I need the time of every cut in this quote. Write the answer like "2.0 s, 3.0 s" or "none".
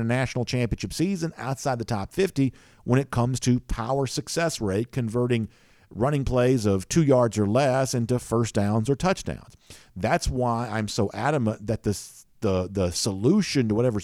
none